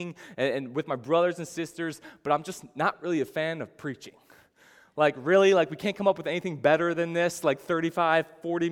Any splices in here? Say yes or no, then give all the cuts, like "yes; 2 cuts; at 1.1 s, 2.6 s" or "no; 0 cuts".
no; 0 cuts